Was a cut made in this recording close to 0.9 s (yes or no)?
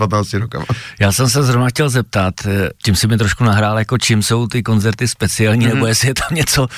no